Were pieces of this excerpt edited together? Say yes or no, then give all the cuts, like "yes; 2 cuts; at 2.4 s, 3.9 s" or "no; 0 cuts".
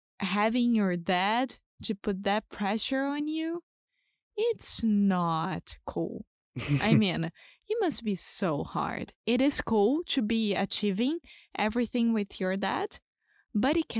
no; 0 cuts